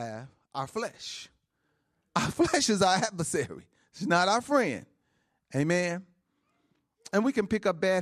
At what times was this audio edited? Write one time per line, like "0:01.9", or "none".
none